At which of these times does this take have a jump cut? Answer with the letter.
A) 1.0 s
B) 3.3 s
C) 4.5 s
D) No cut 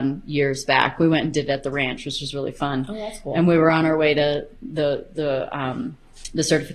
C